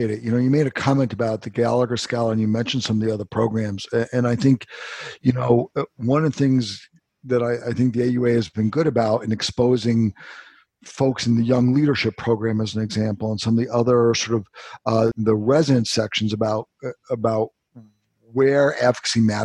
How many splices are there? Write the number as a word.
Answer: one